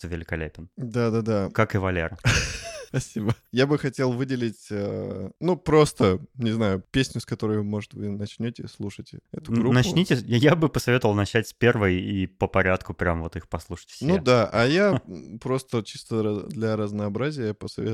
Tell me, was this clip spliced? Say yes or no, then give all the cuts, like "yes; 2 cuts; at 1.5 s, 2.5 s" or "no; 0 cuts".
no; 0 cuts